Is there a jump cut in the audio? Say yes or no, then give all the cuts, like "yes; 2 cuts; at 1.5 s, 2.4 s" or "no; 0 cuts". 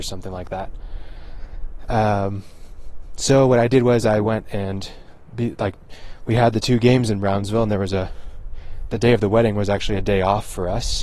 no; 0 cuts